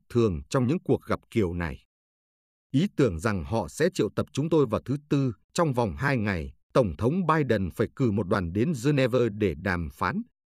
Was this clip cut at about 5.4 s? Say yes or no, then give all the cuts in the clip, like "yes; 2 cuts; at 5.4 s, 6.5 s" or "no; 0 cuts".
yes; 2 cuts; at 5.4 s, 6.6 s